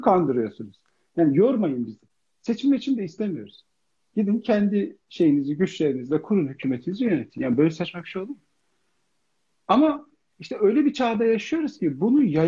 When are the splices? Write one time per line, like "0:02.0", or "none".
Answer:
none